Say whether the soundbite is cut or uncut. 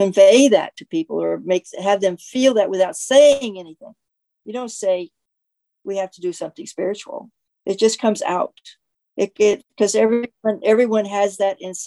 uncut